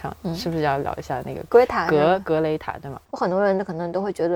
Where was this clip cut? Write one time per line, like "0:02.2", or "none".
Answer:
0:03.1